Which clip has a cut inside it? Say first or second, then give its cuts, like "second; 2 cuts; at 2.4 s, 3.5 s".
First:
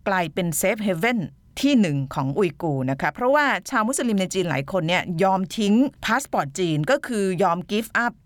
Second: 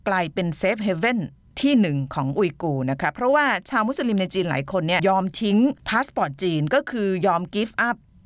second; 1 cut; at 5.0 s